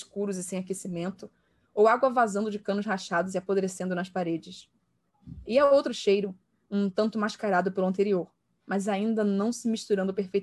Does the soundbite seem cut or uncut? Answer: uncut